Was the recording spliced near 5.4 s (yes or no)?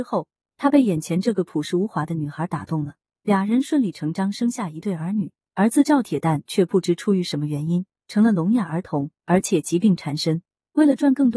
yes